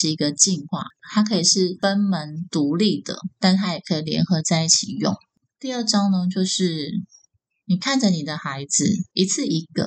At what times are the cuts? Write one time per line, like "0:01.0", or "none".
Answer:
none

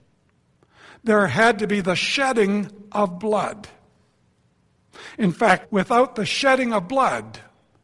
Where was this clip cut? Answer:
0:05.6

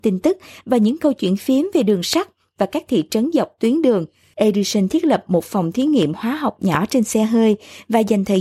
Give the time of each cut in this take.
0:04.3

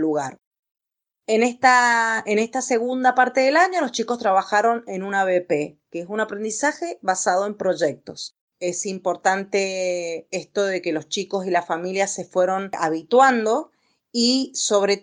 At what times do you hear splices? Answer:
0:08.5

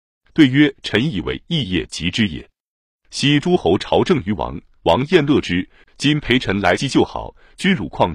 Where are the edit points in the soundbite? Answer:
0:05.8

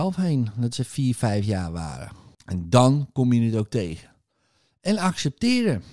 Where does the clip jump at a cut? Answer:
0:02.3

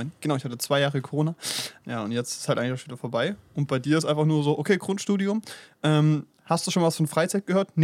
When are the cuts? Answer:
0:01.8

